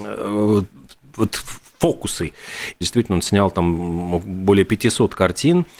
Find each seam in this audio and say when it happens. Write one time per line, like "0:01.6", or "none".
0:02.8

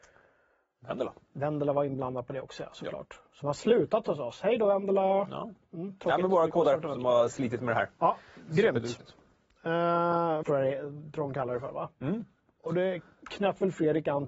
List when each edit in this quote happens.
0:10.4

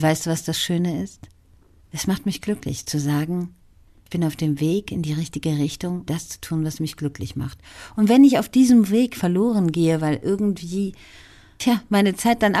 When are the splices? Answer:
0:01.8
0:06.1

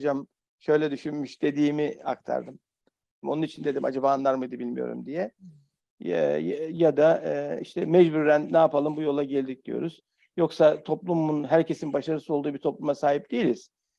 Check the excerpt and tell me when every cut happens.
0:03.2
0:05.8
0:10.3

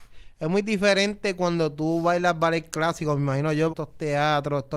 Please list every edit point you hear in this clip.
0:03.7

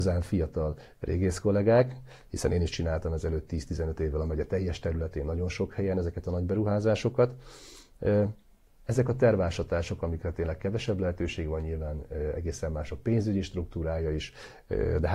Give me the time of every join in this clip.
none

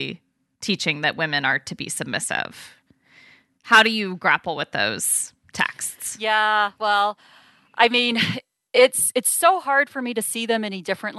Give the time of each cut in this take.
none

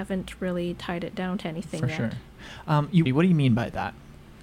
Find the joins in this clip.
0:03.1

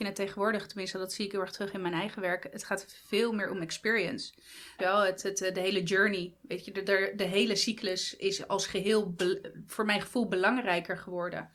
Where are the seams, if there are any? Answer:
0:04.8

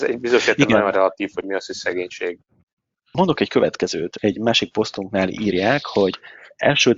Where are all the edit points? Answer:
none

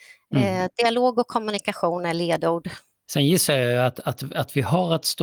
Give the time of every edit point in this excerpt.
0:03.1

